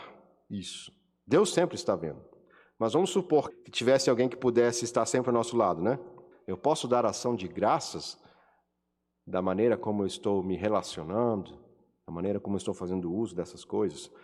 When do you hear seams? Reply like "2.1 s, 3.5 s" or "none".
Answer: 3.5 s, 6.3 s

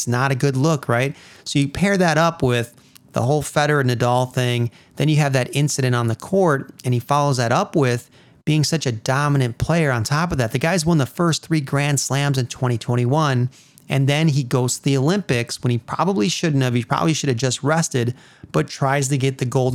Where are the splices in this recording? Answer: none

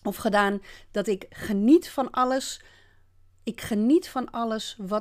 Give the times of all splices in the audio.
none

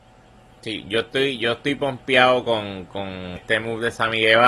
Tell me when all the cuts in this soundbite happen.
3.4 s

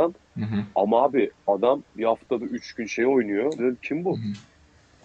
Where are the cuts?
1.9 s, 3.6 s

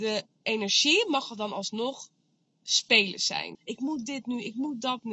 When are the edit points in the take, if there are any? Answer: 3.5 s

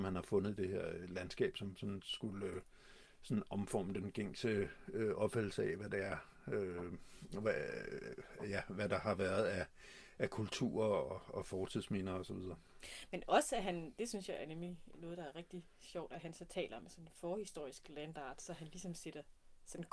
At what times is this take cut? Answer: none

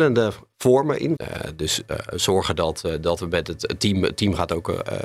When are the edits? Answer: 1.2 s

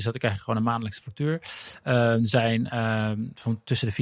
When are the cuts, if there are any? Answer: none

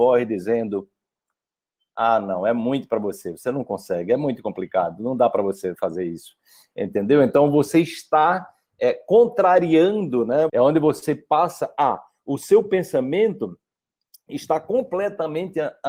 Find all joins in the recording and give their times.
10.5 s

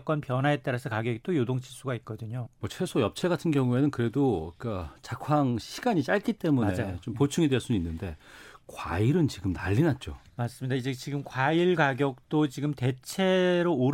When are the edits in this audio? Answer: 2.5 s

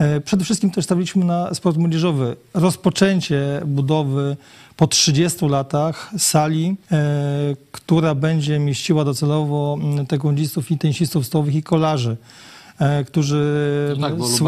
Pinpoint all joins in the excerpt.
6.8 s

